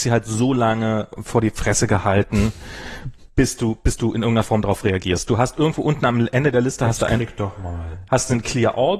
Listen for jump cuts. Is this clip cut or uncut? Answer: uncut